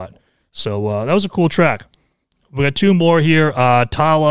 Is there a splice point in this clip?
no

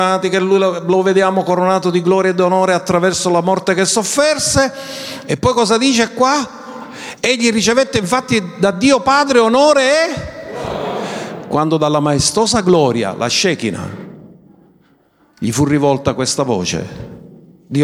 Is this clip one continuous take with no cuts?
yes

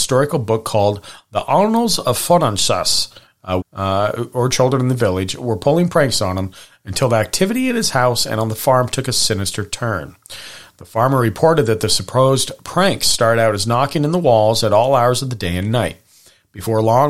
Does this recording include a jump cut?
yes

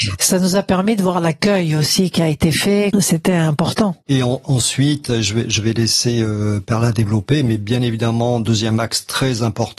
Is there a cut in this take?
yes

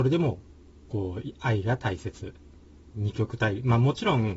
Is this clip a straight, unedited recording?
no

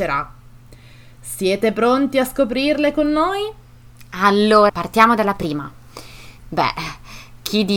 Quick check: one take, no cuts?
no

